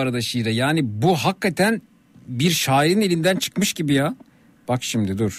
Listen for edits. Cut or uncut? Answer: uncut